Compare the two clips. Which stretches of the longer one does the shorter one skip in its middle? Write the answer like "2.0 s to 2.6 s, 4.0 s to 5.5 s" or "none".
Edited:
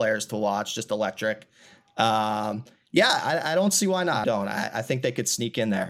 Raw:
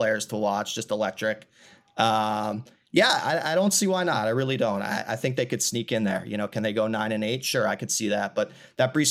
4.2 s to 4.6 s